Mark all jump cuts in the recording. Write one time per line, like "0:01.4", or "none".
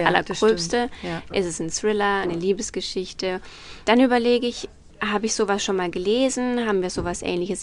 0:02.2
0:03.8